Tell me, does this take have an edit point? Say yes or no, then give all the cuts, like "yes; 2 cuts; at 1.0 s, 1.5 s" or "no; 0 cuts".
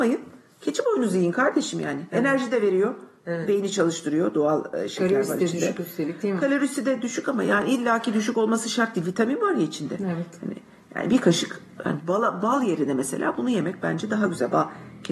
no; 0 cuts